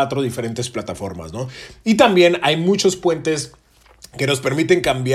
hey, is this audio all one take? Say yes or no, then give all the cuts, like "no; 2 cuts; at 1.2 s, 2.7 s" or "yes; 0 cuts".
yes; 0 cuts